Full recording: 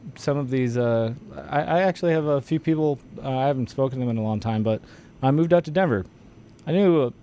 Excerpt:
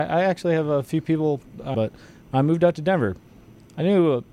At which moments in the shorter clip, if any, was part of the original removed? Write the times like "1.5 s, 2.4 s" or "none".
1.7 s

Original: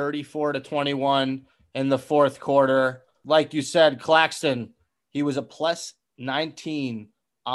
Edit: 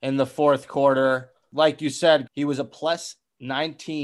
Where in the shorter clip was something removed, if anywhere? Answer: 2.3 s

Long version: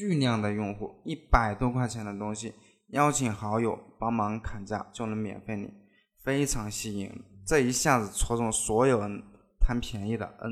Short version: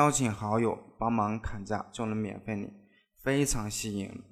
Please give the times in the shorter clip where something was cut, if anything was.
none

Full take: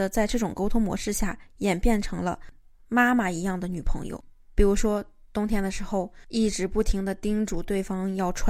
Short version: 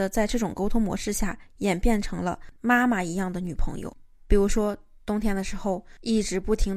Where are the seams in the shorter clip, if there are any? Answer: 2.6 s

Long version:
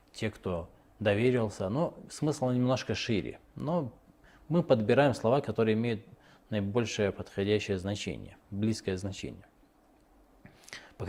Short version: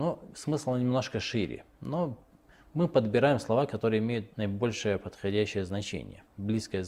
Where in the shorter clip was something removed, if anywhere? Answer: 4.3 s

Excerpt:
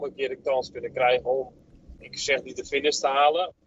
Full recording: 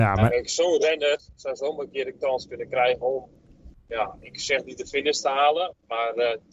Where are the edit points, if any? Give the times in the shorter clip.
2.0 s

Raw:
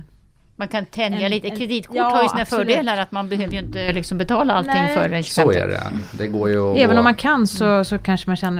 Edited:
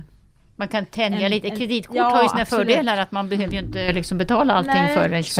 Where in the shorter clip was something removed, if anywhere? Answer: none

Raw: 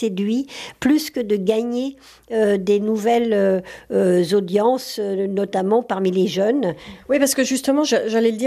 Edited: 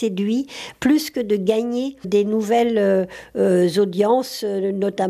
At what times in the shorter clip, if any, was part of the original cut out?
2.0 s

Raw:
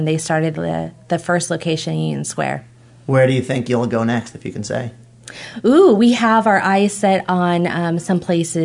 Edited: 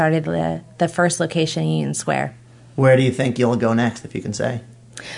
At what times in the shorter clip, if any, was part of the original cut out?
none

